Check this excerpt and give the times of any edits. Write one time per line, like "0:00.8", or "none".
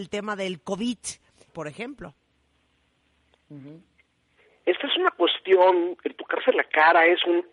0:01.5